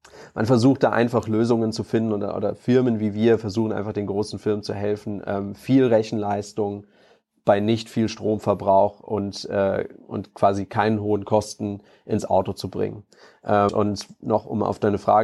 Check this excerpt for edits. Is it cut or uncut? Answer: cut